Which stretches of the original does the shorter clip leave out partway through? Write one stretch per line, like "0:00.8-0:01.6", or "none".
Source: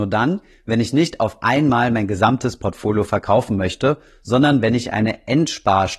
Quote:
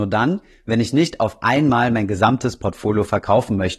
none